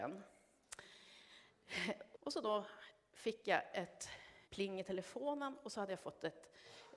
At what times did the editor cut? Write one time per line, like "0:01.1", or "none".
0:02.1
0:04.5

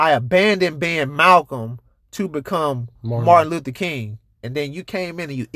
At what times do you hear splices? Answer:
0:04.4

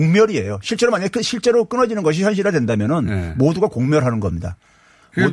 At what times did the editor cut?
none

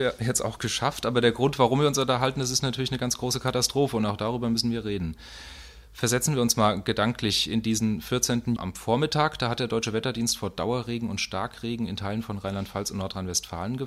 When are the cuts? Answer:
0:08.6

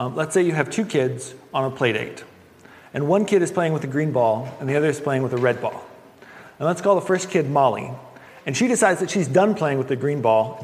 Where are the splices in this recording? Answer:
none

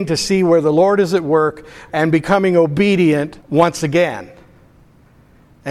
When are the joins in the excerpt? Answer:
0:01.9
0:03.4

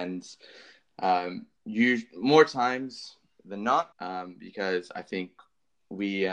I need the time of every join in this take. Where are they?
0:03.9

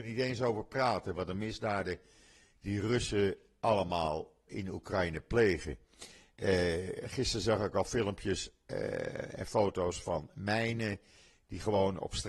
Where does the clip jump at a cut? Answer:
0:04.5

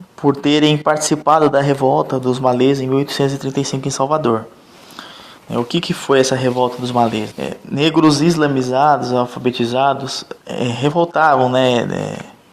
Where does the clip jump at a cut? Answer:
0:07.3
0:10.4

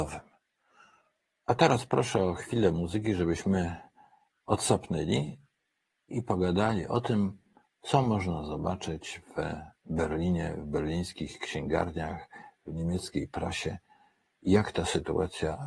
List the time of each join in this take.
0:01.4

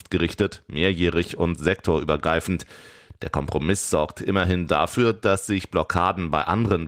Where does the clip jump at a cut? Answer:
0:03.1

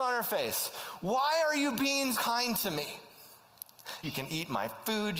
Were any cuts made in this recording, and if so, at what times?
0:02.1
0:04.0

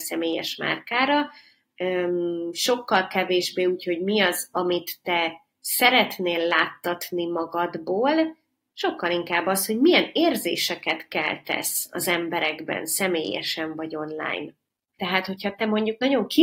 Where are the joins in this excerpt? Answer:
0:15.0

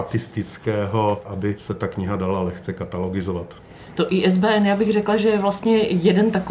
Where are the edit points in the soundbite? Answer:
0:01.2

